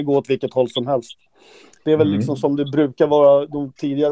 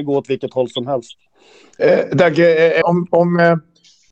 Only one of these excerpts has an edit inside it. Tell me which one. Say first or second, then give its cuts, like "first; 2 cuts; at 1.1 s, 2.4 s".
second; 2 cuts; at 1.8 s, 2.8 s